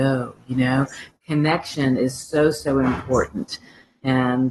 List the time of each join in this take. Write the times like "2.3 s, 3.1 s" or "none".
none